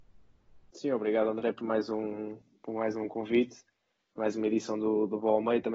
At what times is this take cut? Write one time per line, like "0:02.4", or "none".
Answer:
none

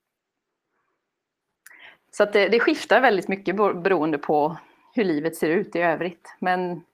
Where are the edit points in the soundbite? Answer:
none

